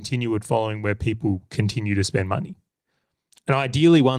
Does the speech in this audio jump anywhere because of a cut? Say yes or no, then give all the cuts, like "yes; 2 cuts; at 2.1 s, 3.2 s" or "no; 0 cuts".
no; 0 cuts